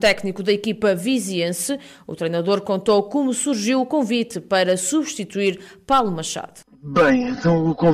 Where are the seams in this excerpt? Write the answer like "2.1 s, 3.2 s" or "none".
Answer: 6.6 s